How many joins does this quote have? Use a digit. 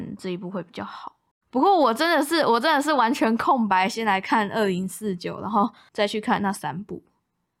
1